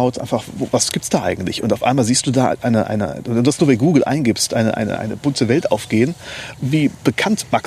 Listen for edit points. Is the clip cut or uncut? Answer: cut